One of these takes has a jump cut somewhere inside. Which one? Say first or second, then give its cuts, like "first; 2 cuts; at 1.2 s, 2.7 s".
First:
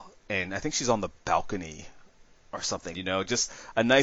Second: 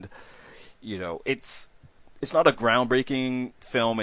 first; 1 cut; at 2.9 s